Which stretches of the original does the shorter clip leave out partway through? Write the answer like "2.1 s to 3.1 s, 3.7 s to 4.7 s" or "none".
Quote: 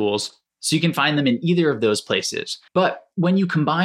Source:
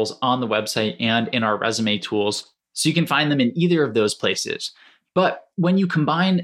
4.8 s to 5.1 s